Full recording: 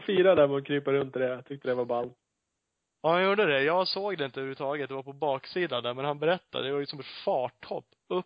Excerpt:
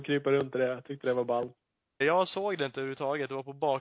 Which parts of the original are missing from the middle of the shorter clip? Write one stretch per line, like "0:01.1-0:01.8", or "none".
0:02.6-0:03.6